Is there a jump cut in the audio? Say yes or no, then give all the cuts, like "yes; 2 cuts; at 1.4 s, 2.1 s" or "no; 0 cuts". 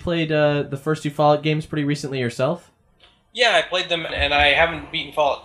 yes; 1 cut; at 4.1 s